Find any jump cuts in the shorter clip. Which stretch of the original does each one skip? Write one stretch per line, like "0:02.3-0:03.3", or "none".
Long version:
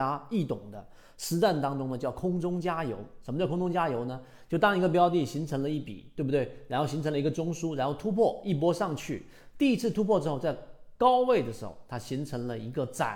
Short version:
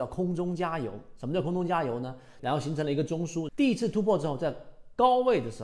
0:04.4-0:06.7
0:07.8-0:09.5